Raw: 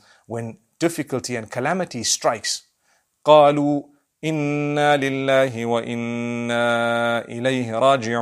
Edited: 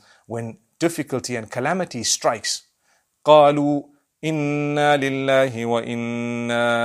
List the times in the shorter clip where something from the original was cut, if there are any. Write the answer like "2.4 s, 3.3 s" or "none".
none